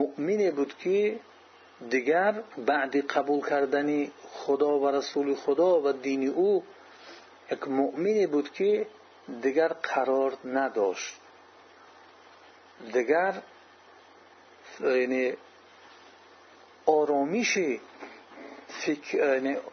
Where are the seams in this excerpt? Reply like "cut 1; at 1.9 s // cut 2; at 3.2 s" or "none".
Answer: cut 1; at 2.5 s